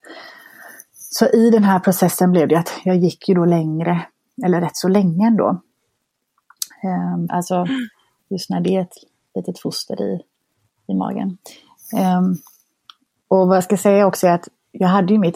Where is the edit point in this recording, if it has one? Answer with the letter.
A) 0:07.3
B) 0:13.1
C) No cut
A